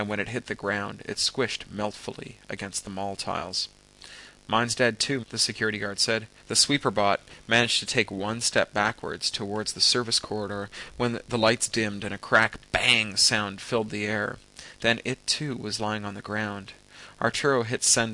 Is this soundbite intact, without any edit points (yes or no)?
no